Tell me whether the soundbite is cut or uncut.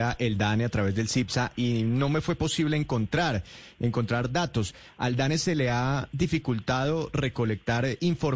cut